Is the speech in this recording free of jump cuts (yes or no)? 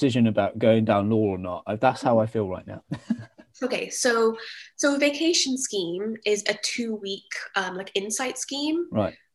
no